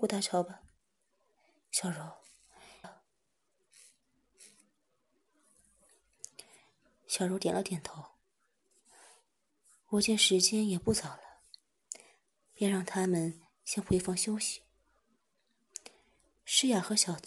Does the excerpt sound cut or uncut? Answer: cut